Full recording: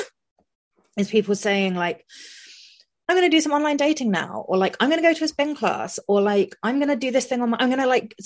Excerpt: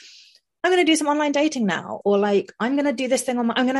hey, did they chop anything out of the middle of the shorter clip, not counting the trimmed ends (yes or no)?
yes